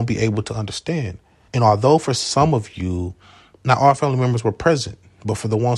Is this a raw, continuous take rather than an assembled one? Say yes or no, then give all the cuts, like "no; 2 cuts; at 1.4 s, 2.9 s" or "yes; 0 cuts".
no; 1 cut; at 1.5 s